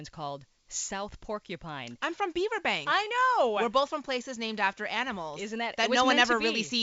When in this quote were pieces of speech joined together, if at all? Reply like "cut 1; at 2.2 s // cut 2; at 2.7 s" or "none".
none